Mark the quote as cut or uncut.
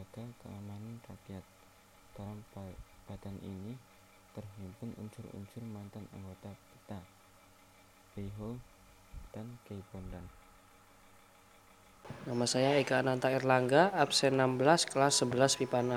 cut